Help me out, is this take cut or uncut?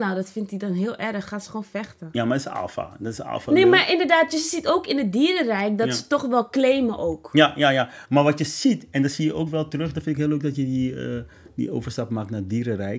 uncut